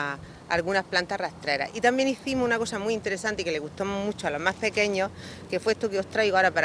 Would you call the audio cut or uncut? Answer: uncut